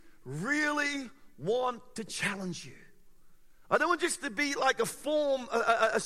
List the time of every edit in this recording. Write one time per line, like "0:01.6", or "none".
0:03.6

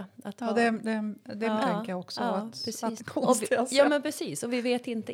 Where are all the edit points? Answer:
0:01.6
0:03.0

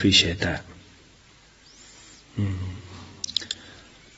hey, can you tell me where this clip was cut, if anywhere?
none

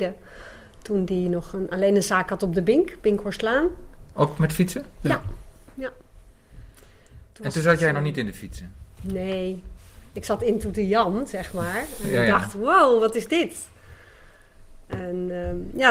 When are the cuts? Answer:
none

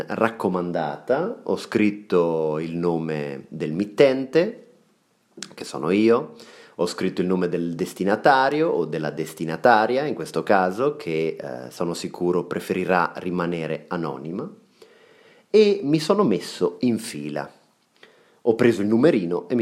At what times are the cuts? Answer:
none

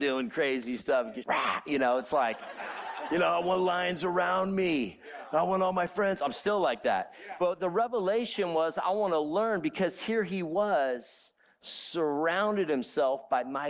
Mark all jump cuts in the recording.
0:01.2

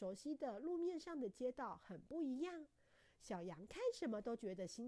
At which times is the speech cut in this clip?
none

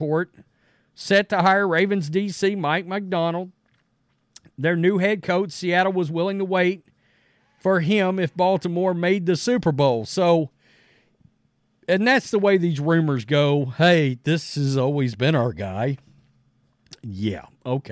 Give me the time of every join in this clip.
none

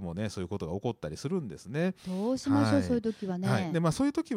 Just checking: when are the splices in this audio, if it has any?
none

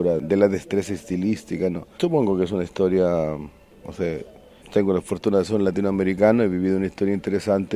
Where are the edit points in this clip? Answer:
0:02.0

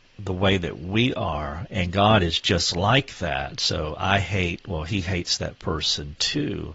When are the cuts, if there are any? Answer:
0:01.7

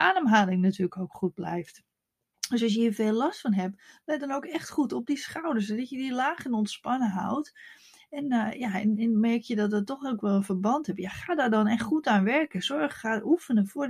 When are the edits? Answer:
none

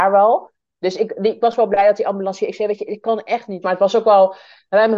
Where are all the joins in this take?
0:03.6

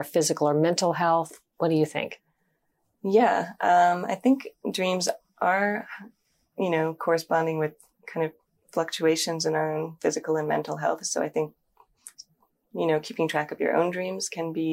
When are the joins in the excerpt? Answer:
none

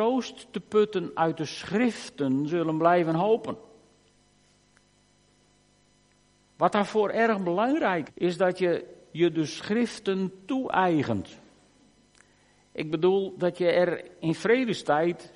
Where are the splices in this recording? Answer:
0:08.1

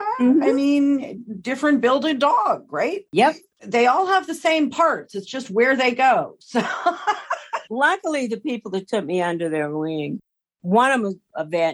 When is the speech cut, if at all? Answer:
none

